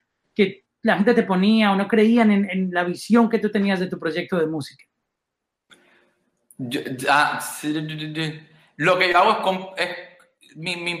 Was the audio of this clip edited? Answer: no; 0 cuts

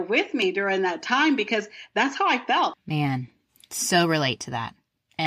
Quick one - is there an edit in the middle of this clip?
yes; 1 cut; at 2.7 s

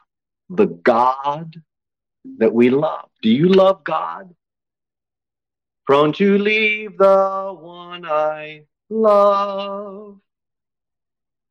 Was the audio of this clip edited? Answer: yes; 1 cut; at 5.8 s

